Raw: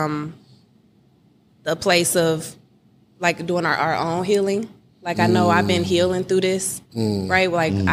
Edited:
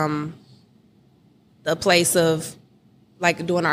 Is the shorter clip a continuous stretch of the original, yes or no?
yes